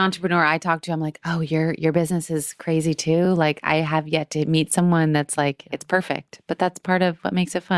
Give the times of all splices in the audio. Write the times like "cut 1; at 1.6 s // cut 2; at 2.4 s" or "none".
none